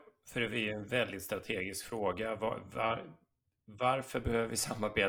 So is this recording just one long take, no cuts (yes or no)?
yes